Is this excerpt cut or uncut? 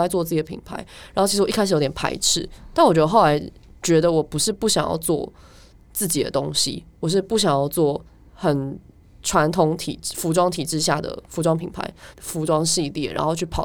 cut